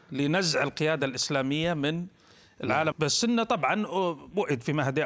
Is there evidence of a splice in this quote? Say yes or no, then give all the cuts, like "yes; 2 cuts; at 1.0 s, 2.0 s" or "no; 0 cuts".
yes; 1 cut; at 2.9 s